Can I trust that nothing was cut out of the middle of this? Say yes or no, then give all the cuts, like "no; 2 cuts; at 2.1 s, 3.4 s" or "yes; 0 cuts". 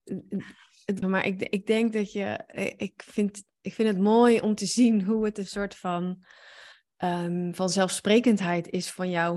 no; 1 cut; at 1.0 s